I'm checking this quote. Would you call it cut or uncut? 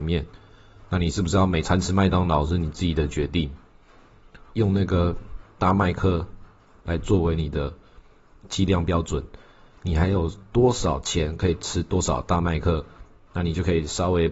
cut